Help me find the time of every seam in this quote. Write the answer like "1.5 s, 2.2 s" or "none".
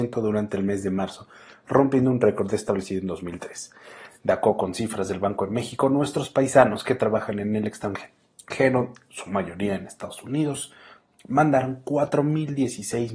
none

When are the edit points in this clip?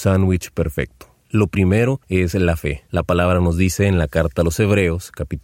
2.9 s

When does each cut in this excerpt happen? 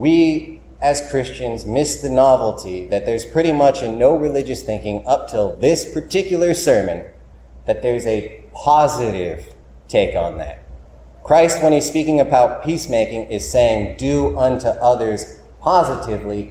none

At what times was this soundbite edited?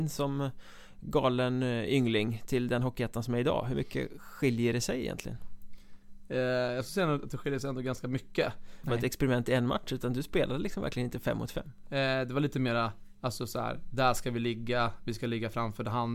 8.8 s, 11.8 s

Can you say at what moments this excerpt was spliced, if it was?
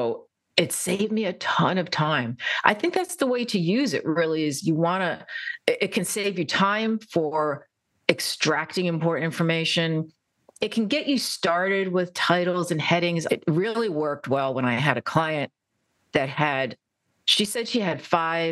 13.3 s

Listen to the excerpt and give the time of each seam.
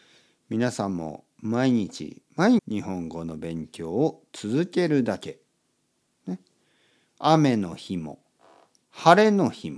2.6 s

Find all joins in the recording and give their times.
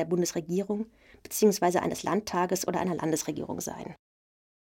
none

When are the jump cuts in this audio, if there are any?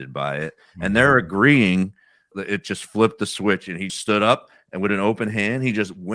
2.3 s, 3.9 s

